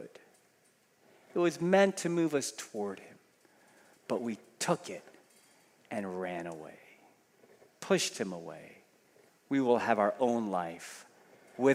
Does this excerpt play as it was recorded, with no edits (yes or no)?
yes